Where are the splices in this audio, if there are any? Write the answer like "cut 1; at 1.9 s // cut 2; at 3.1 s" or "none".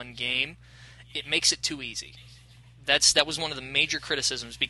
none